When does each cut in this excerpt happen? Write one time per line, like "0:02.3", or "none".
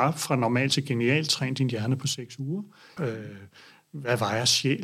0:03.0